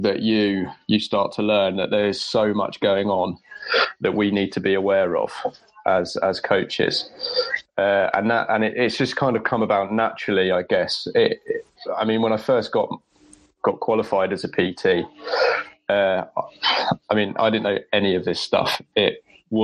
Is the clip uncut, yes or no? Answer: yes